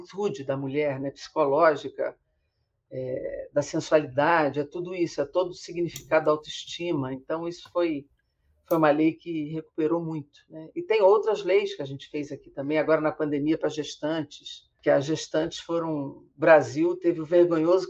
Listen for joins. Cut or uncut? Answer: uncut